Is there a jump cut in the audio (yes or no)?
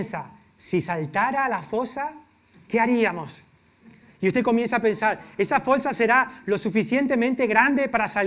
no